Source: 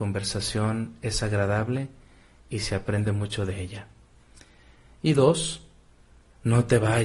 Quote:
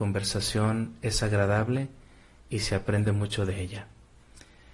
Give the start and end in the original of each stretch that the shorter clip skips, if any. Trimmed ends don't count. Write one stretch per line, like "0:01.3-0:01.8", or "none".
none